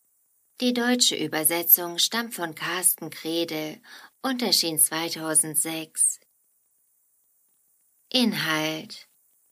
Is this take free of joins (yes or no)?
yes